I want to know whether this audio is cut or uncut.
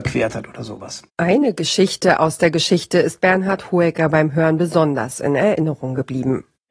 cut